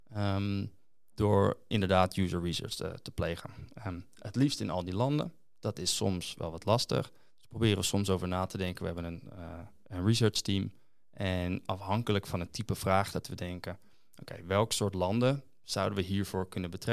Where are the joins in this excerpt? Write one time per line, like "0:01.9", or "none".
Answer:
none